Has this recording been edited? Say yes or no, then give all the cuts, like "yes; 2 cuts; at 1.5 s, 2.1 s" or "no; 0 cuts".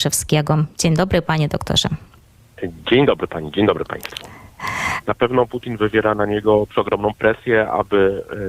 yes; 2 cuts; at 5.0 s, 7.1 s